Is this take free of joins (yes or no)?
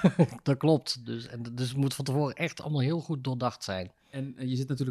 yes